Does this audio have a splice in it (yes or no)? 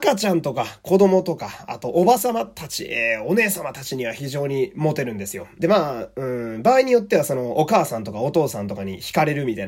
yes